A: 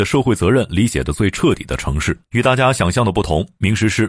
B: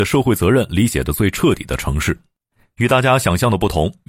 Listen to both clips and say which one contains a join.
A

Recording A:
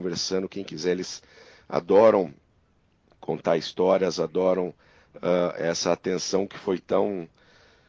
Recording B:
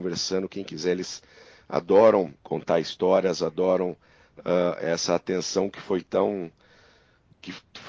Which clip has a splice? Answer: B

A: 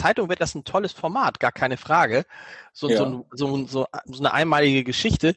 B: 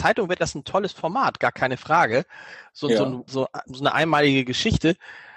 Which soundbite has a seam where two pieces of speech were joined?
B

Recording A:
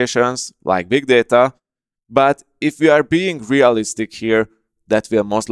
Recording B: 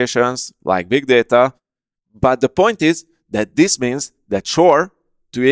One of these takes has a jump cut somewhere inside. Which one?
B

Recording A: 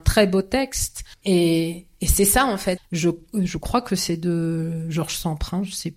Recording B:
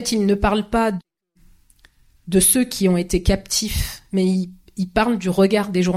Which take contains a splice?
A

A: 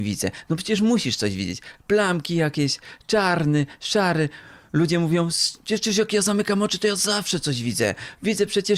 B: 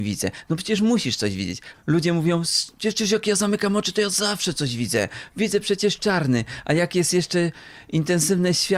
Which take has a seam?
B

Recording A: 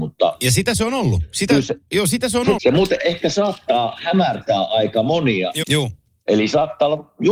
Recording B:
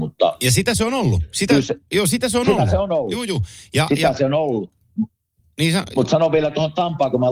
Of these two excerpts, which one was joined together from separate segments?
A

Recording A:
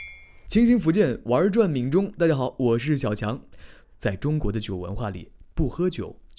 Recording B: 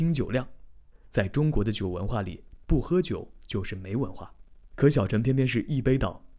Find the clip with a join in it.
A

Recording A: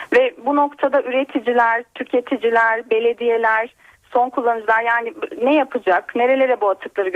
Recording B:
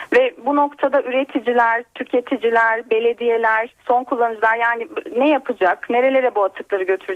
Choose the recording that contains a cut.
B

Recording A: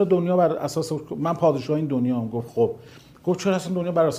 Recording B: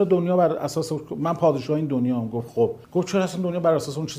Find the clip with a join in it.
B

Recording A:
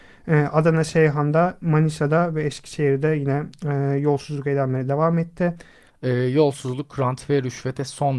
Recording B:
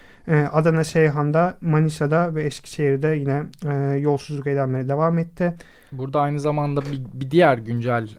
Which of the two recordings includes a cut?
A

